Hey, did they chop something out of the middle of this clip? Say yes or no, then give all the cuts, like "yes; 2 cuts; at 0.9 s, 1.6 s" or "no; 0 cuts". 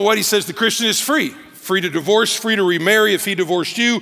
no; 0 cuts